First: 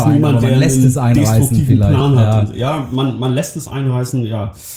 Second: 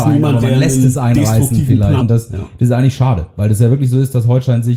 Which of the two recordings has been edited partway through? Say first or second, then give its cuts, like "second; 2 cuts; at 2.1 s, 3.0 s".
second; 1 cut; at 2.0 s